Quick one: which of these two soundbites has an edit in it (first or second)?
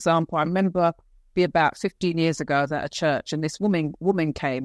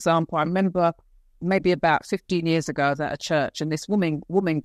first